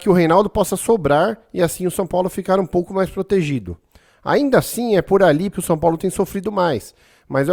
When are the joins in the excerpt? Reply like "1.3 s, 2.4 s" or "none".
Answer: 5.5 s